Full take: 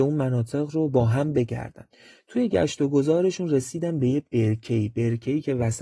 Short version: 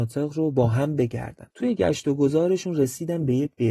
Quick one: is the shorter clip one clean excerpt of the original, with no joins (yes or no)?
no